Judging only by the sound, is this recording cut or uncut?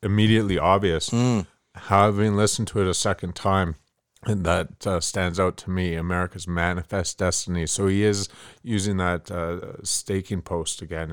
uncut